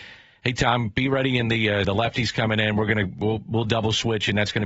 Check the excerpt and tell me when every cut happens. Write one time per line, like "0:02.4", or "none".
0:01.8